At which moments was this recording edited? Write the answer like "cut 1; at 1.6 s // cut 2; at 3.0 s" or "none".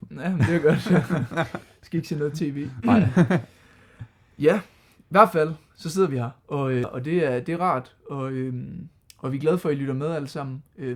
cut 1; at 6.8 s